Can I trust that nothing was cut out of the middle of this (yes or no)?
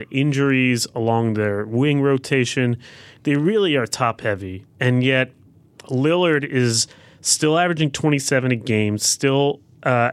yes